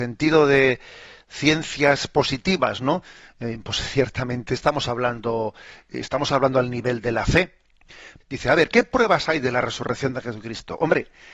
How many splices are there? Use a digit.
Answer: 1